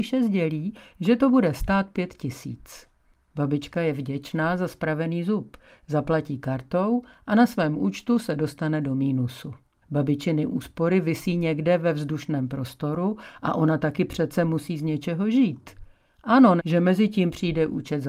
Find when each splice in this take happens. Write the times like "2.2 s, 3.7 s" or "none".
9.8 s, 16.6 s

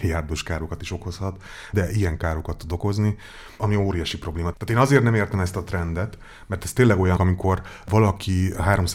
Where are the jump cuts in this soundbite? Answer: 1.7 s, 7.2 s

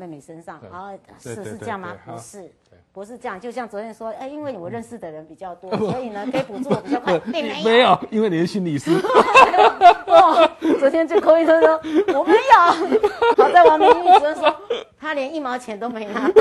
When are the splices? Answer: 13.3 s

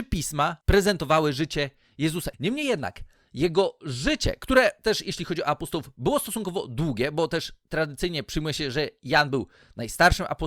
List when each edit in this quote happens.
2.3 s

